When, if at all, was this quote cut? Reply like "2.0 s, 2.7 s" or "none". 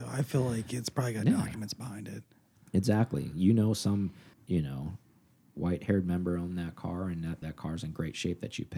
4.3 s, 7.4 s